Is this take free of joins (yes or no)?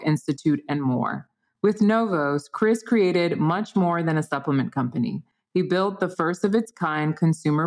yes